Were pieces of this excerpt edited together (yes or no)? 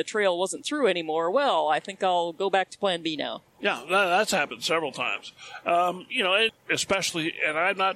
yes